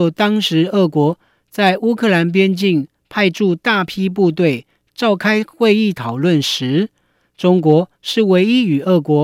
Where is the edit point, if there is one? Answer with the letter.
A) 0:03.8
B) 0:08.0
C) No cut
C